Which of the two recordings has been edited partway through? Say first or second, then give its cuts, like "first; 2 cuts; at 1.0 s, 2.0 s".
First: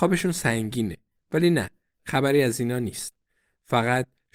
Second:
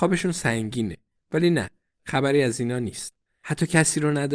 second; 1 cut; at 3.3 s